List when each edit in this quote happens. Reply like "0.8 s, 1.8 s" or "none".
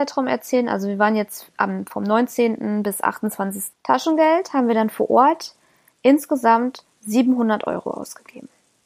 3.7 s